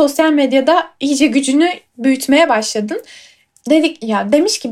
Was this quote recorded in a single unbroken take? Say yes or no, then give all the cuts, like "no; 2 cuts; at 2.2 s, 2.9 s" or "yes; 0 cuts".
no; 1 cut; at 3.6 s